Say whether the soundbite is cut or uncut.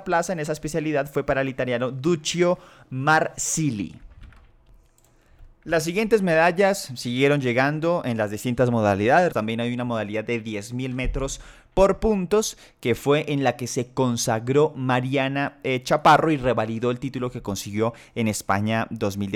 cut